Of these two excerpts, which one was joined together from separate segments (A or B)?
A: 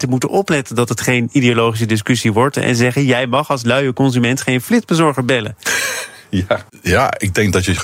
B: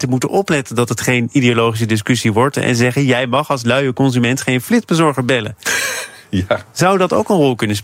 A